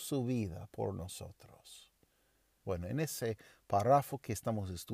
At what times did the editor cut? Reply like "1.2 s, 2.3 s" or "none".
2.6 s